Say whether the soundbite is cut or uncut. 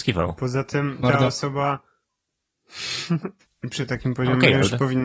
cut